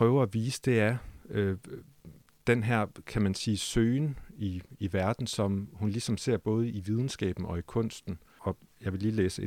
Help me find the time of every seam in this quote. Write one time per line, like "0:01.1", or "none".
0:08.4